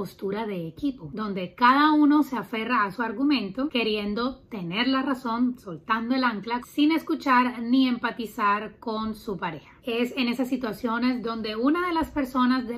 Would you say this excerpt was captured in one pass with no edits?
no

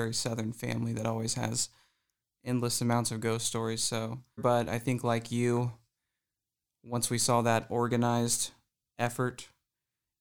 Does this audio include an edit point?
yes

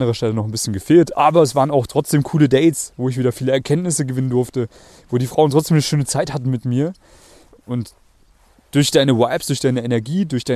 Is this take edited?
yes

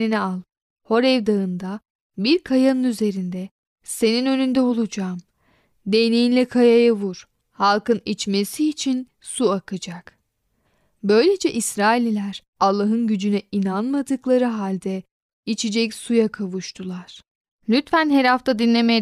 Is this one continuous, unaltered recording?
no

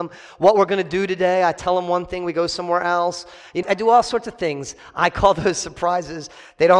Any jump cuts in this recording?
yes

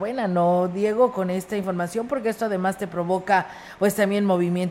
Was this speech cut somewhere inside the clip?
no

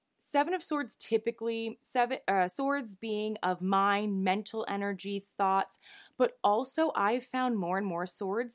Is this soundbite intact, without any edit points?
yes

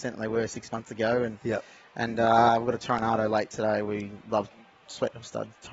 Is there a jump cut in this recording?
no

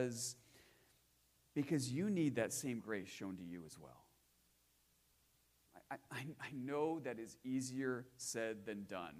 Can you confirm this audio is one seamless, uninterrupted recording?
yes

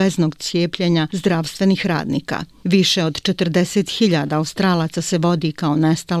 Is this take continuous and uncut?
no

